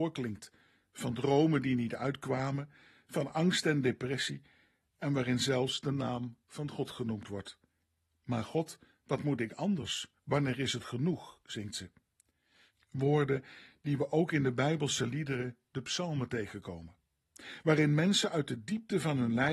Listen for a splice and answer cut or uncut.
uncut